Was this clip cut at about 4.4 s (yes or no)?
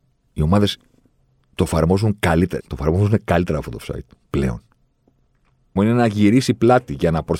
no